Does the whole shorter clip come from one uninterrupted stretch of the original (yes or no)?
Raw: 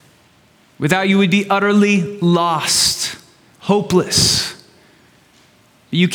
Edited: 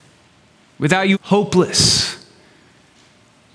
no